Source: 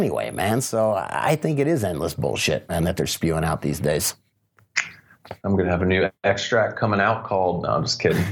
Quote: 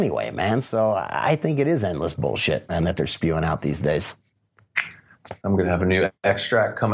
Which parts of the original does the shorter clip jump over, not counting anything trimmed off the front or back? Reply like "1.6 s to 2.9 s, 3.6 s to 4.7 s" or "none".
none